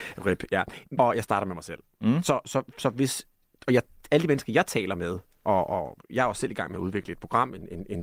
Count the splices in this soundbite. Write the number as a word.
two